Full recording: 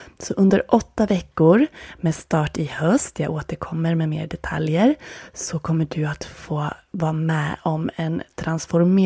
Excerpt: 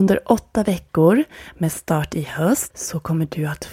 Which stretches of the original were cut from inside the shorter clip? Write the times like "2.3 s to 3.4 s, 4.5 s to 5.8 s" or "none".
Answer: 3.1 s to 5.3 s